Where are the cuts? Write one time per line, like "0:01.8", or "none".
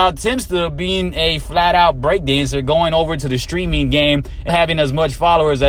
0:04.5

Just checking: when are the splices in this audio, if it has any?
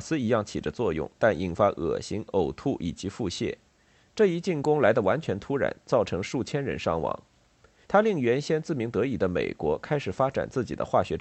0:04.0
0:07.8

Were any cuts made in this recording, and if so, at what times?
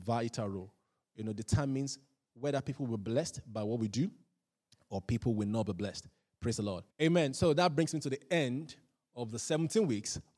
0:06.9

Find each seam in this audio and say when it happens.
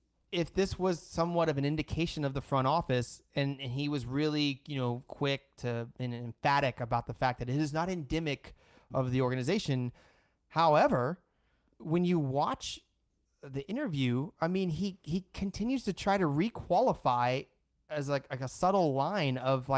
0:11.7

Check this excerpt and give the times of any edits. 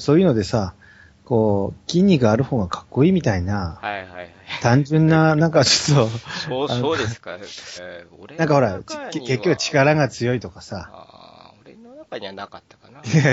0:07.8

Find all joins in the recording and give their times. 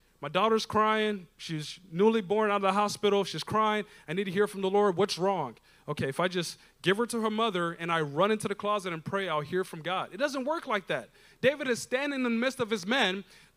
none

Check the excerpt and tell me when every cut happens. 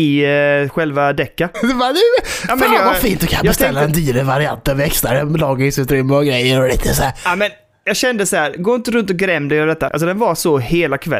0:01.5
0:09.9

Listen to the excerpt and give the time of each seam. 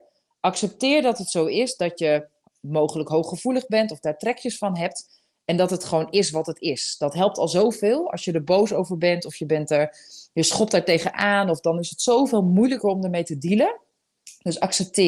none

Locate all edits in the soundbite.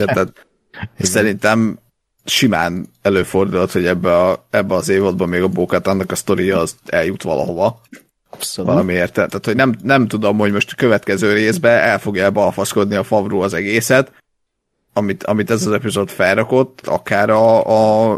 0:09.3
0:16.8

